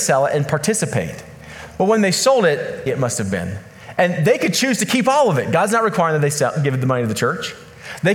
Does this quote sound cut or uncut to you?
cut